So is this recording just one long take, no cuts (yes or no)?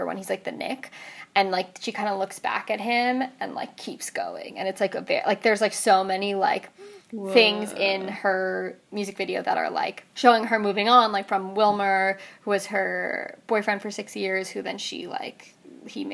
yes